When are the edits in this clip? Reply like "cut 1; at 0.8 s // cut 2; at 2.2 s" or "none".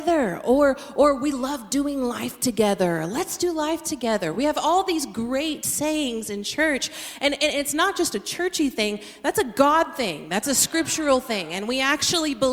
none